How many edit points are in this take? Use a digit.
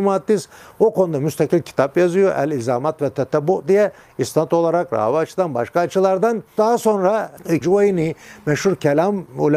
1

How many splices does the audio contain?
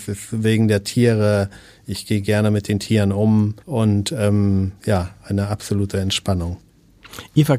2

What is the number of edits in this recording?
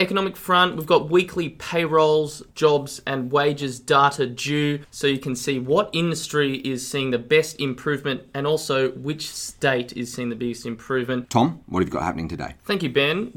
1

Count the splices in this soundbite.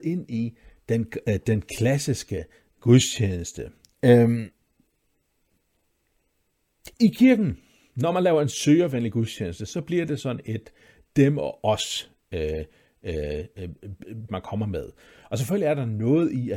2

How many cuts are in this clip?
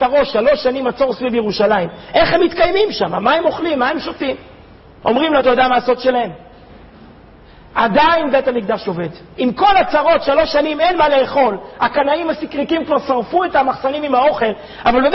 1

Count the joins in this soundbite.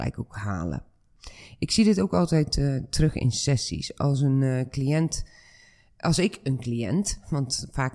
0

